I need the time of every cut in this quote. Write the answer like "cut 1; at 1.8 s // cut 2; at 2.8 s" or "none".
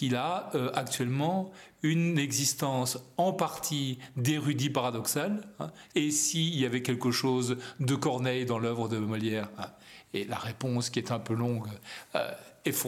cut 1; at 5.9 s